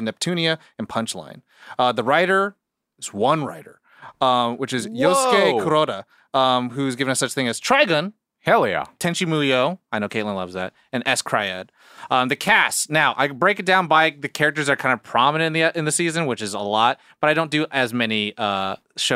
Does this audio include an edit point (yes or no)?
no